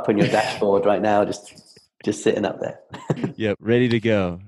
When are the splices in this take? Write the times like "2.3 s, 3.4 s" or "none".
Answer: none